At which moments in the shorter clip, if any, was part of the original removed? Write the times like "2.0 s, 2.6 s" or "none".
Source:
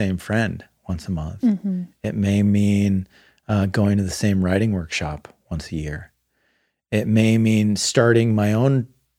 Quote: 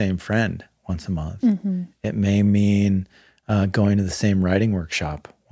none